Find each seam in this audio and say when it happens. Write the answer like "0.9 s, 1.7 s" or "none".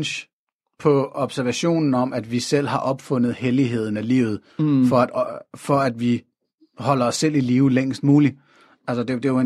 none

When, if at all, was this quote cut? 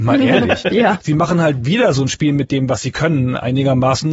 1.0 s

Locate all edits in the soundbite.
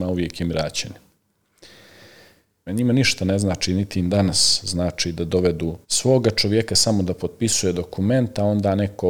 2.7 s, 5.8 s

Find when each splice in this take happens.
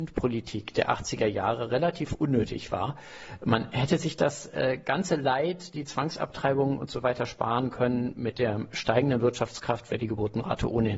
none

